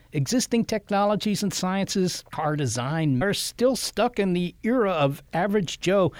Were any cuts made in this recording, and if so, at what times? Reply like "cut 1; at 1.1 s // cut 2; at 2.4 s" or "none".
cut 1; at 3.2 s